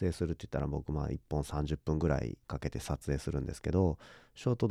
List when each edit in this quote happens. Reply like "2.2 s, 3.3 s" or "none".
2.4 s